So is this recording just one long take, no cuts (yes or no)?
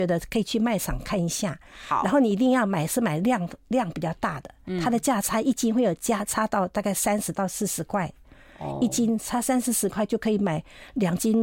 yes